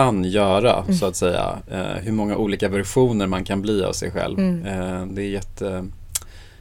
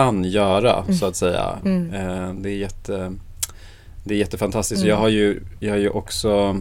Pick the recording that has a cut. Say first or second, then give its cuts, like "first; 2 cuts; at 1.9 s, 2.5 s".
second; 1 cut; at 1.6 s